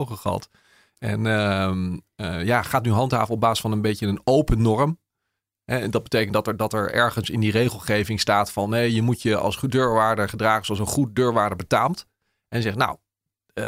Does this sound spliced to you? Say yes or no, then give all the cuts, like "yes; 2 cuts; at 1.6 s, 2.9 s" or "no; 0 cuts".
no; 0 cuts